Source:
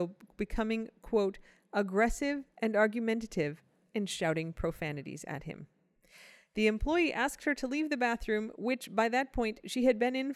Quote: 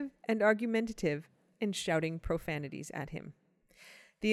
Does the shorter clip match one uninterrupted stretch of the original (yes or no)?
yes